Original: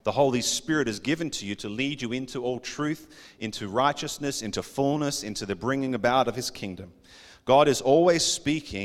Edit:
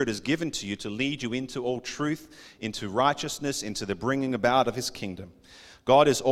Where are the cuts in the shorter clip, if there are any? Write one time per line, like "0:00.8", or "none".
0:03.6